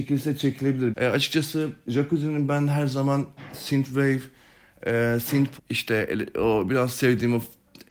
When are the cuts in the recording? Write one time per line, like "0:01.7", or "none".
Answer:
0:00.9
0:05.6